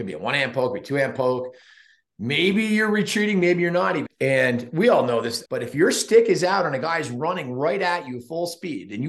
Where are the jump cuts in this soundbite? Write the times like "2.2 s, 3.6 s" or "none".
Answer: 4.1 s, 5.5 s